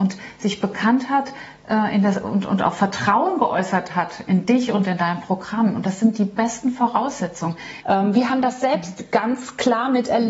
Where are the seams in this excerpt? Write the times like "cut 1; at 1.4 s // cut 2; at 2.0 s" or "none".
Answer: cut 1; at 7.8 s